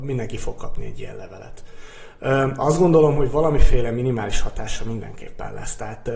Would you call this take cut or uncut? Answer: uncut